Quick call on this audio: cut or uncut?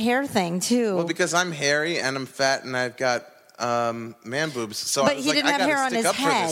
uncut